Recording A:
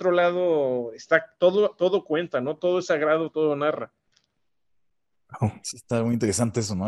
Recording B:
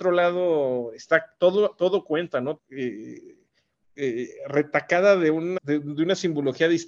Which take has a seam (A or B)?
B